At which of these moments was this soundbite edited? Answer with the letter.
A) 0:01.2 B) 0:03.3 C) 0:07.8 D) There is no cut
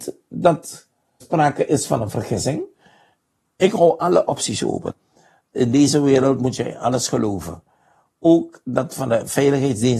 A